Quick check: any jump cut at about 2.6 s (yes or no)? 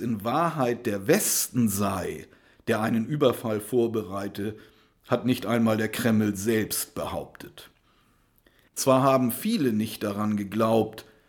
no